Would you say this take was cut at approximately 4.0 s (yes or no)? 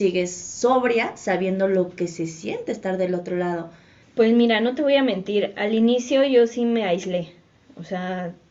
yes